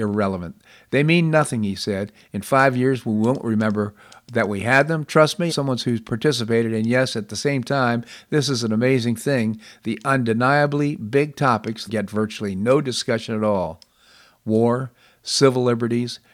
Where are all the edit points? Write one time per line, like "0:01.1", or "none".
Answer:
0:05.5
0:11.9